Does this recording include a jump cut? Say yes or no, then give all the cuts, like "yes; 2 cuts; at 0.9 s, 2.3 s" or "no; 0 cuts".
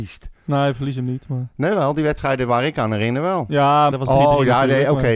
yes; 1 cut; at 3.9 s